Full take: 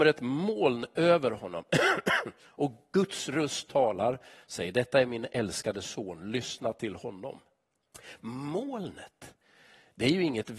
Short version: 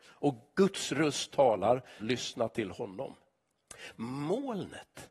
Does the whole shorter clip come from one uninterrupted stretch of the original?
no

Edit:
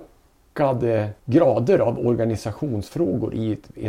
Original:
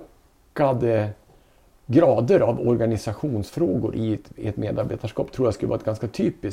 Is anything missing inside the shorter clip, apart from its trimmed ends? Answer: yes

